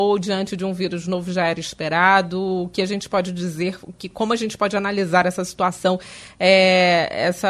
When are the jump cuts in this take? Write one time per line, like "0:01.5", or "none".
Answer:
none